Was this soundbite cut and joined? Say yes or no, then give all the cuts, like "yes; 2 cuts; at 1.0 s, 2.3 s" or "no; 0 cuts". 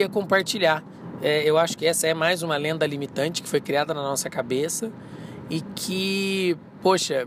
no; 0 cuts